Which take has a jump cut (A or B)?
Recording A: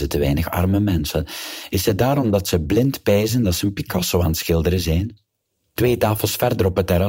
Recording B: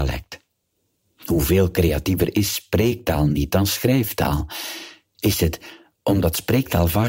A